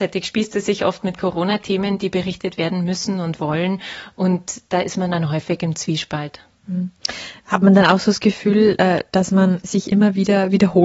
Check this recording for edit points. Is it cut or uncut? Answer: uncut